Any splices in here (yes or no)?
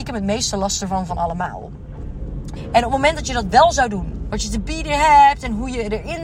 yes